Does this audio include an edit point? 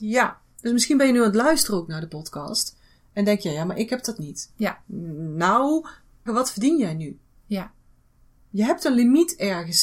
yes; 1 cut; at 6.3 s

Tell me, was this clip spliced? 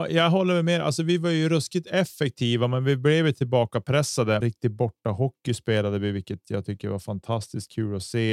yes; 1 cut; at 4.4 s

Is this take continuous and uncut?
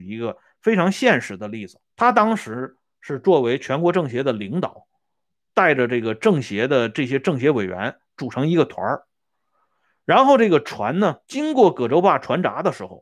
no; 3 cuts; at 1.9 s, 5.5 s, 11.2 s

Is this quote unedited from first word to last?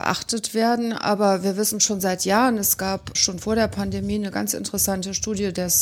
yes; 0 cuts

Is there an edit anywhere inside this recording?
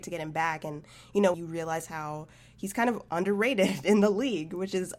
yes; 1 cut; at 1.3 s

